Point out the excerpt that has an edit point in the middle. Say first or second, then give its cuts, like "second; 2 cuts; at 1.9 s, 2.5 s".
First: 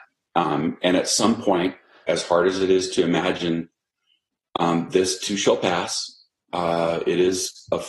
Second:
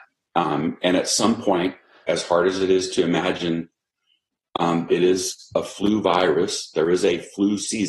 second; 1 cut; at 4.9 s